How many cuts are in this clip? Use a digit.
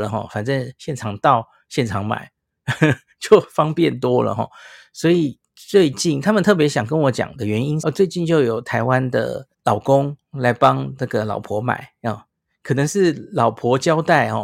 2